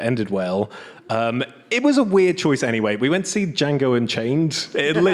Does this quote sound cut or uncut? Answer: uncut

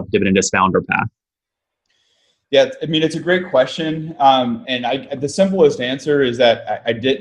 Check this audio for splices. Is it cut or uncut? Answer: cut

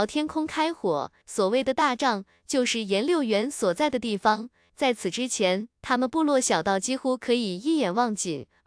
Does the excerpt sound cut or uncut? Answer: cut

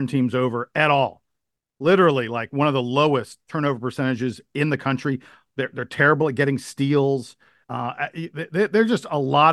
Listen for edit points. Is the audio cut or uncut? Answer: cut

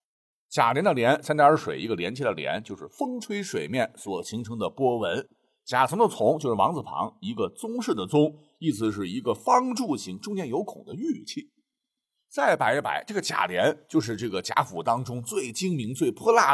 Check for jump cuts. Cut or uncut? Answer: uncut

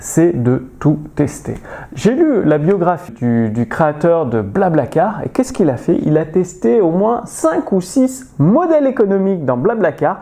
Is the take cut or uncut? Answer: cut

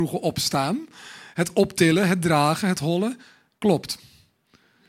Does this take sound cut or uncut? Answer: cut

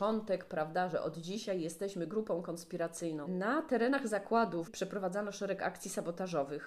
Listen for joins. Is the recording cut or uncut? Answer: cut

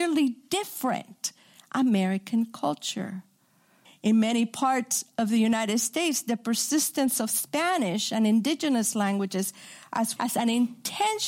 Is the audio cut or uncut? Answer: cut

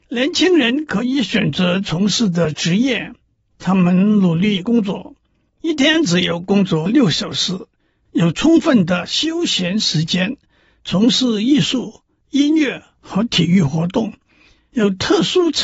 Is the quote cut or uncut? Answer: uncut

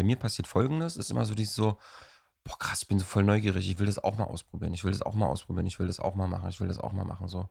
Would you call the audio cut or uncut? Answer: uncut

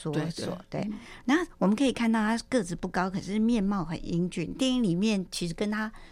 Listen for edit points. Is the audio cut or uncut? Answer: uncut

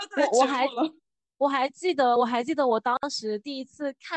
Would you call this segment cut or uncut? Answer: uncut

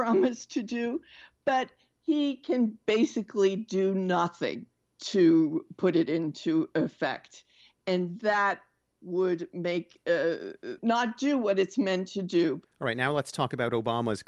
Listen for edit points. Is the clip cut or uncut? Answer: cut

